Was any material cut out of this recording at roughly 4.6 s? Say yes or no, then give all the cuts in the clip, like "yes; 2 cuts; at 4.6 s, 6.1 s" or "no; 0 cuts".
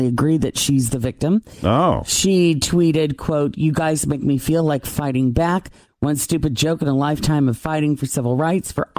no; 1 cut; at 5.8 s